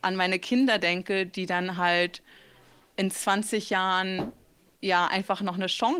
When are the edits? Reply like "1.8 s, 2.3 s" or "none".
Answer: none